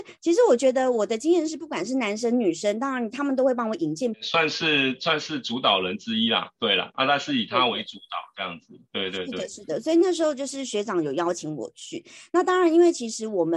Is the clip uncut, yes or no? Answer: no